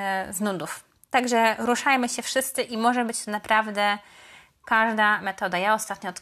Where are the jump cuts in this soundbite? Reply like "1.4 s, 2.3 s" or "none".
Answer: none